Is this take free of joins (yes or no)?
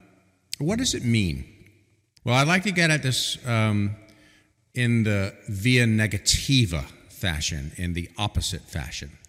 no